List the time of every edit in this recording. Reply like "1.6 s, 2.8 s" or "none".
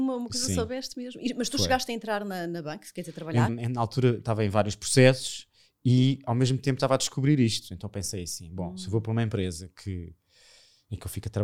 3.5 s